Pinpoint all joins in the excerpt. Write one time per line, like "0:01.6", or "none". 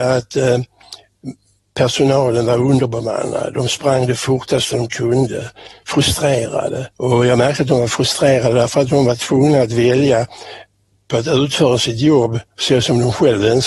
0:06.9